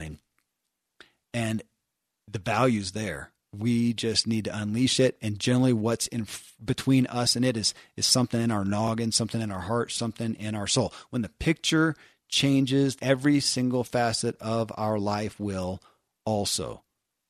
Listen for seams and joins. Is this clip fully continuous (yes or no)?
no